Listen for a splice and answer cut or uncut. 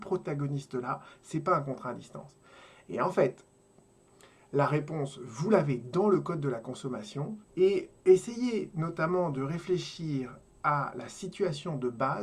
cut